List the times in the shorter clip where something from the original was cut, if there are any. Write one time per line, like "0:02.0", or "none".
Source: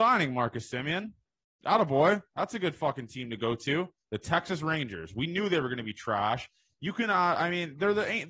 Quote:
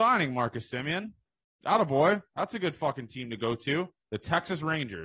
none